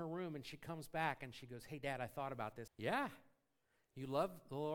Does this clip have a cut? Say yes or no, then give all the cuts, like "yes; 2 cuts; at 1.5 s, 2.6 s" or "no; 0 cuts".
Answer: yes; 1 cut; at 2.7 s